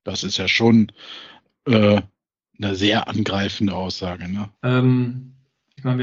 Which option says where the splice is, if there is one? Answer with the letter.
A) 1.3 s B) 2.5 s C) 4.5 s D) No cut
C